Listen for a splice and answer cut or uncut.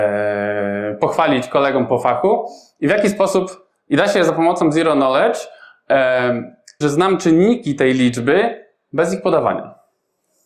cut